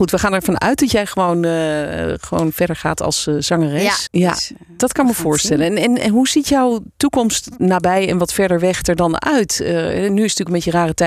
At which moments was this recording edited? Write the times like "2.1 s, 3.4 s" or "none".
4.1 s